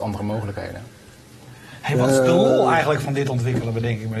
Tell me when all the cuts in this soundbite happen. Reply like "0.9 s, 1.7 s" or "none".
none